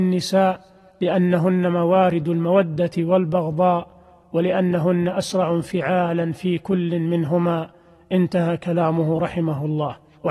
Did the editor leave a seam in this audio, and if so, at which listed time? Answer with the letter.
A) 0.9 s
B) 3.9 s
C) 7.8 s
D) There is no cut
D